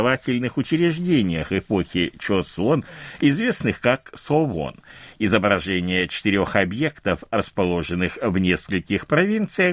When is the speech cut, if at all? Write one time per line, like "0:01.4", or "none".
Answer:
none